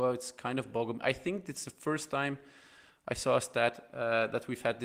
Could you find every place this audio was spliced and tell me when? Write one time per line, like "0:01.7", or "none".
none